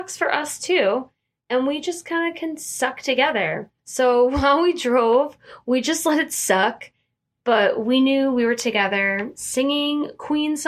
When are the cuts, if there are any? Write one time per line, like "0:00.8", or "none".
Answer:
none